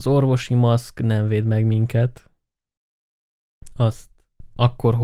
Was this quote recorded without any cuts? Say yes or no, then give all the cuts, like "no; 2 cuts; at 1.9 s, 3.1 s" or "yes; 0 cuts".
yes; 0 cuts